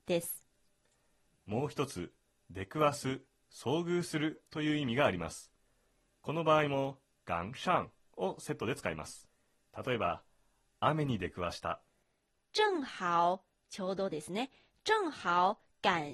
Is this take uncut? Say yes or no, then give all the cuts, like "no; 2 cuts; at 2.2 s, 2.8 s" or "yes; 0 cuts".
yes; 0 cuts